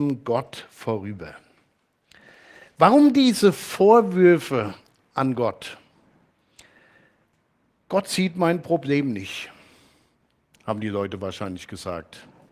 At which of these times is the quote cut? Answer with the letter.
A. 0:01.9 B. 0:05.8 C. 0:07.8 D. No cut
D